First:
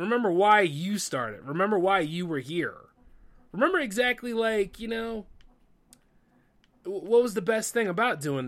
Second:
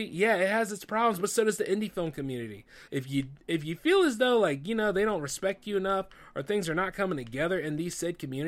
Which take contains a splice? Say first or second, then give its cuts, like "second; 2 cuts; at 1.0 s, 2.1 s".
second; 1 cut; at 2.9 s